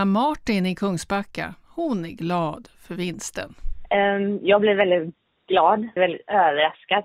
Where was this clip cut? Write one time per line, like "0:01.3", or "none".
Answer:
0:06.0